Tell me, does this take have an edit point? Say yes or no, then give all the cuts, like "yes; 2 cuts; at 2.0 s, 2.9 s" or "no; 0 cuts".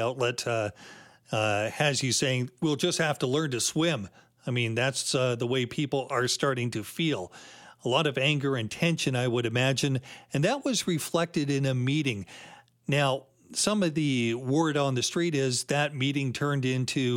no; 0 cuts